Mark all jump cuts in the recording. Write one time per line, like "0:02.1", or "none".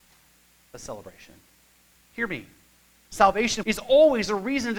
0:02.0
0:03.6